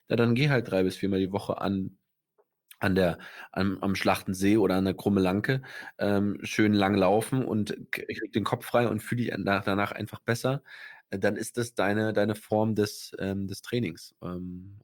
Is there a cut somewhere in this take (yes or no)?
no